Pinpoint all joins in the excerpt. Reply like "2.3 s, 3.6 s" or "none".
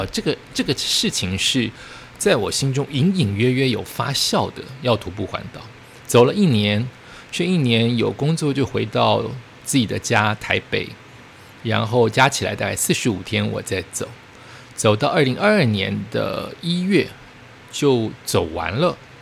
none